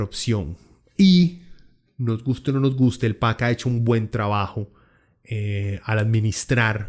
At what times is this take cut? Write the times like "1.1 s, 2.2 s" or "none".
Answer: none